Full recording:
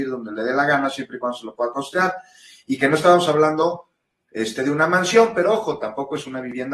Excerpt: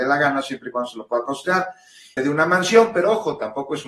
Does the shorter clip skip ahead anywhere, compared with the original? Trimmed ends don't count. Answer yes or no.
yes